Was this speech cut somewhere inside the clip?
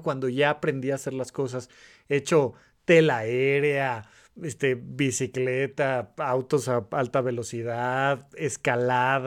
no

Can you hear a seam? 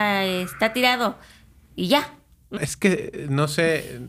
yes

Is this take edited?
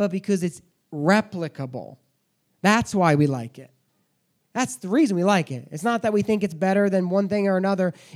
no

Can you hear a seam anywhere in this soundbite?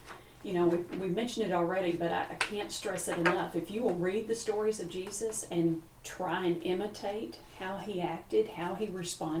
no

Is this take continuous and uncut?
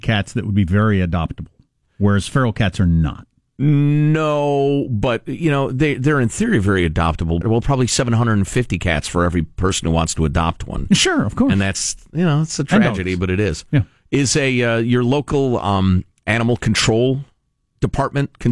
no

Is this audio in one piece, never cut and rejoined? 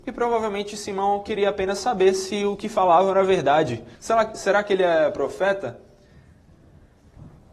no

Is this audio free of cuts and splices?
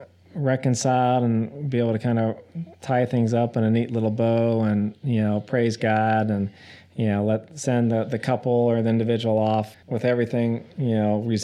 no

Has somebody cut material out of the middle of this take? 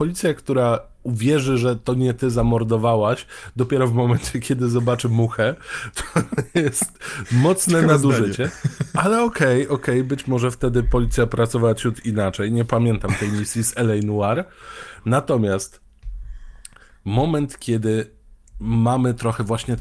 no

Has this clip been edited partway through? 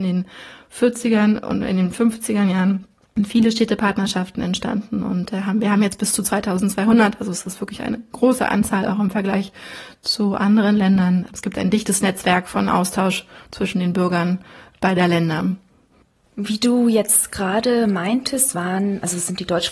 no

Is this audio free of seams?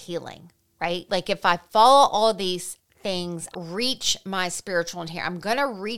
no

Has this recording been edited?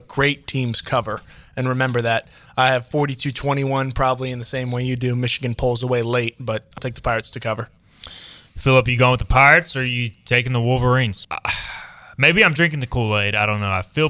yes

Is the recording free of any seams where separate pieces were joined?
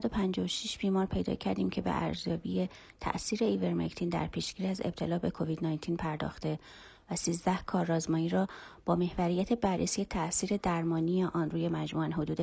yes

